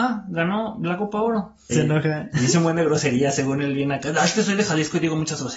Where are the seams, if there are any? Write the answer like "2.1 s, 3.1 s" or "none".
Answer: 1.7 s